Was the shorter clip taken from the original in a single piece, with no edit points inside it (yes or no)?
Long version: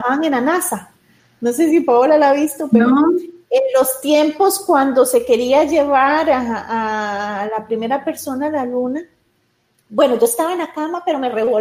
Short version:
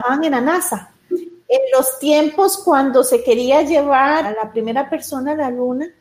no